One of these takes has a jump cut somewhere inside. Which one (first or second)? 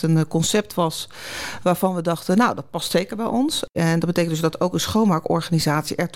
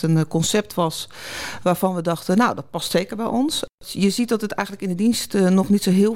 first